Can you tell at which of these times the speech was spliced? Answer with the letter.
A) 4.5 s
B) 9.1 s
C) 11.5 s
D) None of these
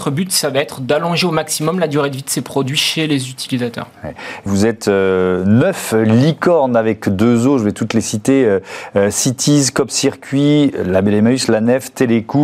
A